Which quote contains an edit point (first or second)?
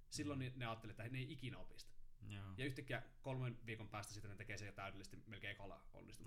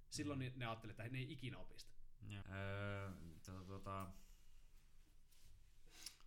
second